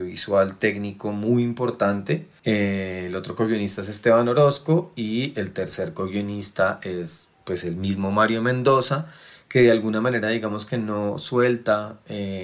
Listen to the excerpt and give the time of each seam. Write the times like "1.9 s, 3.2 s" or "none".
2.4 s, 7.3 s